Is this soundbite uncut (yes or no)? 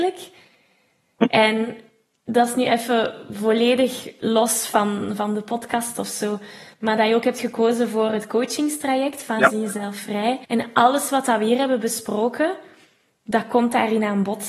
no